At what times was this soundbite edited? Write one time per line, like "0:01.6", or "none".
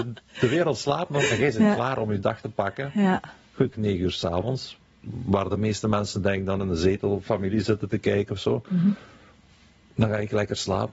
0:03.7